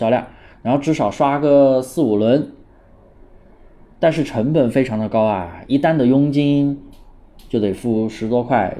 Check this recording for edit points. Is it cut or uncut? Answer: uncut